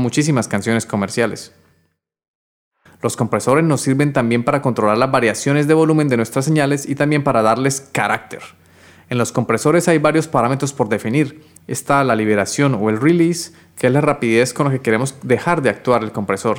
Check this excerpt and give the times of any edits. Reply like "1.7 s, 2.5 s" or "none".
2.9 s, 11.6 s

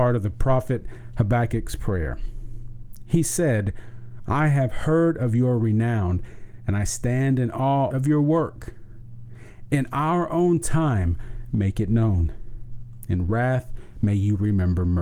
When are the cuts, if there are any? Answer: 4.2 s, 7.9 s, 9.7 s

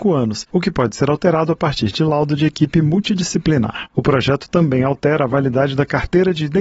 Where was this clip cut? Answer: 3.9 s

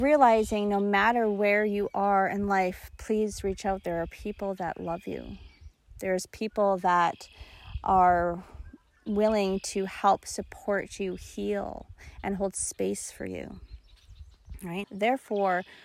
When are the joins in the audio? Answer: 14.8 s

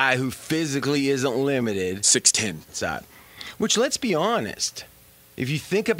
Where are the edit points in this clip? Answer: 2.7 s

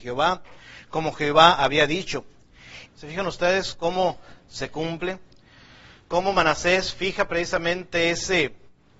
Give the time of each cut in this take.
2.9 s

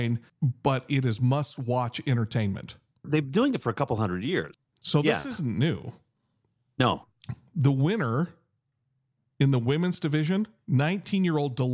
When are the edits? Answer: none

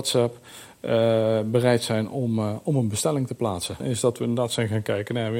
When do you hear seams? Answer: 3.8 s

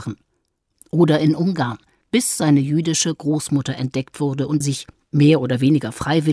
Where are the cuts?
2.0 s, 4.6 s

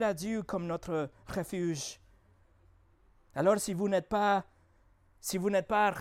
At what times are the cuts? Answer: none

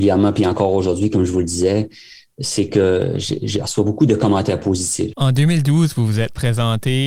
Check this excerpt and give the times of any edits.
5.1 s

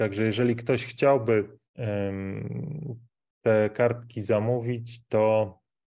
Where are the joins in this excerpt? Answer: 1.7 s

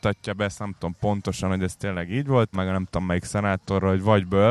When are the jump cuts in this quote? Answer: 2.5 s

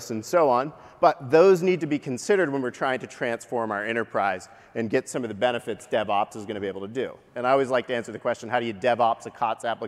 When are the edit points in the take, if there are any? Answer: 7.2 s

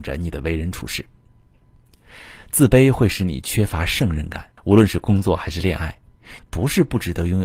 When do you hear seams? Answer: 4.6 s, 6.4 s

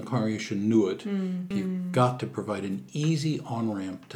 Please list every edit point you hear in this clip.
1.5 s

